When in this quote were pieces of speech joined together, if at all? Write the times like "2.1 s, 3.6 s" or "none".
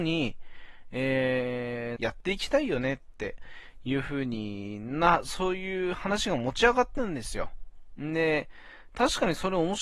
2.0 s